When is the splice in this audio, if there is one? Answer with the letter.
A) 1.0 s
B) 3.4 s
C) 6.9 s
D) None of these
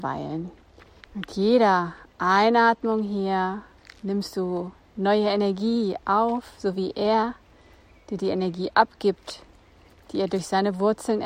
A